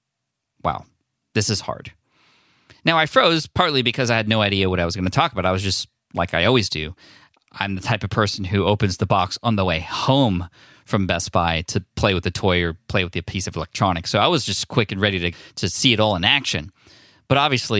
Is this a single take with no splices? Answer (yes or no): yes